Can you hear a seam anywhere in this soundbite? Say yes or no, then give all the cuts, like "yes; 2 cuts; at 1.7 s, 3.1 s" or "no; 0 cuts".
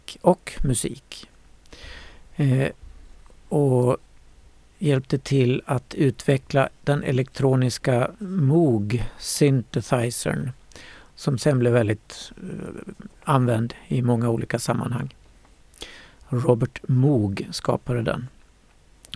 no; 0 cuts